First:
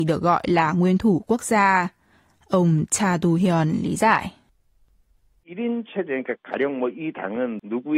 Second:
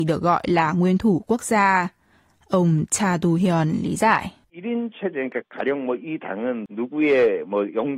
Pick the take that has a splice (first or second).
second